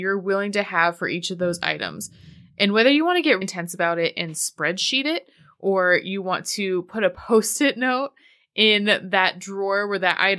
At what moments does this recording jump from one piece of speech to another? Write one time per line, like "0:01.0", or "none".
0:03.4